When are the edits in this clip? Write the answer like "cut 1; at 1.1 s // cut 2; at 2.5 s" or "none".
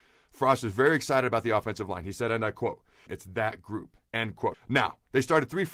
cut 1; at 3.1 s // cut 2; at 4.5 s